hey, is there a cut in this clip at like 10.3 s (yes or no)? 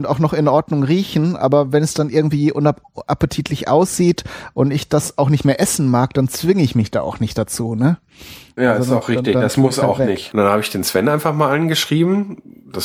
yes